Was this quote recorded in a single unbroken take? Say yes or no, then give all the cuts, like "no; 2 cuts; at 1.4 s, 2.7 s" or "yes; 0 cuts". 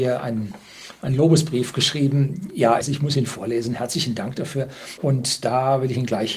no; 2 cuts; at 2.8 s, 5.0 s